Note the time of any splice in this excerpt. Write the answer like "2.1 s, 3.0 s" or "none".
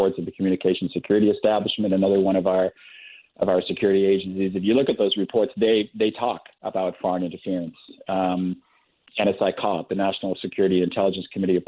none